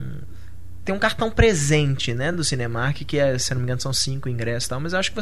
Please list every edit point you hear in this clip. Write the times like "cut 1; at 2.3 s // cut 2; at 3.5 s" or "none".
none